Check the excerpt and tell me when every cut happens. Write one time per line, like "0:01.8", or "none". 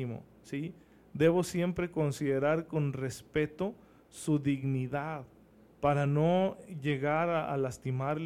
none